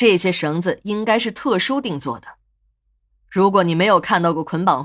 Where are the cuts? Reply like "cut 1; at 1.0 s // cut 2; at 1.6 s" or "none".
none